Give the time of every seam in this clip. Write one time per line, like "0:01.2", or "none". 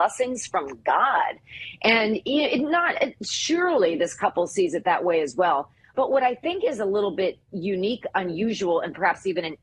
0:05.9

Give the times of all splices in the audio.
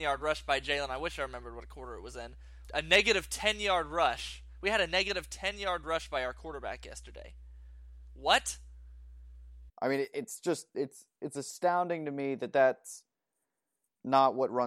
0:02.7
0:09.7

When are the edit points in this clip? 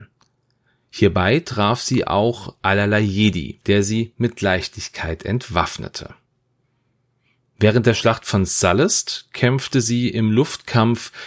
0:03.6

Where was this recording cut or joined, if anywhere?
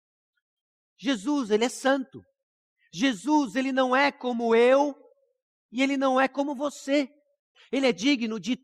0:07.5

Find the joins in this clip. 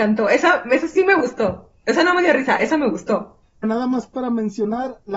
0:03.6

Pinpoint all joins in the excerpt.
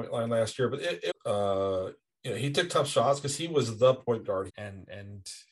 0:01.1
0:04.5

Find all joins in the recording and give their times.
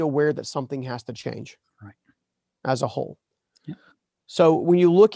none

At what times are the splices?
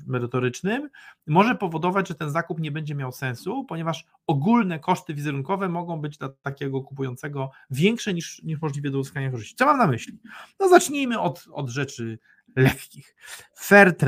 none

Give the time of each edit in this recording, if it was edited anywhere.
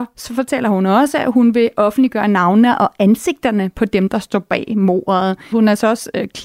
0:05.5

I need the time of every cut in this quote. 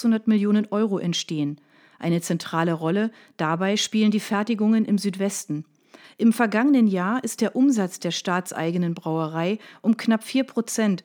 0:06.0

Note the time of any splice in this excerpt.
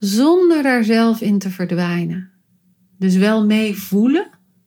none

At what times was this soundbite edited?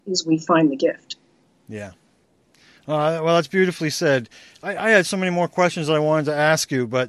none

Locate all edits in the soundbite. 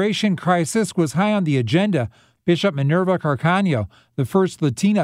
0:02.4

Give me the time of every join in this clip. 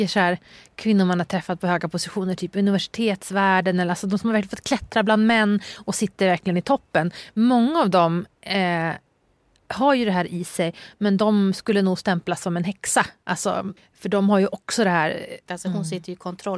0:13.8
0:15.5

